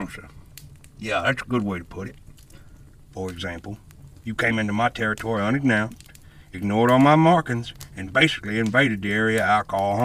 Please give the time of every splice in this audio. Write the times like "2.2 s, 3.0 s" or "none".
3.1 s